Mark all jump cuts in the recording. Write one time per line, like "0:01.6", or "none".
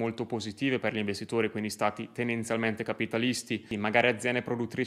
none